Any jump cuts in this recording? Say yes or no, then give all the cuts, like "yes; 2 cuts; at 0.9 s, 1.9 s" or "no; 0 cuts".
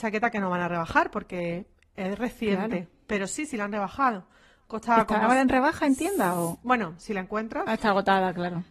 no; 0 cuts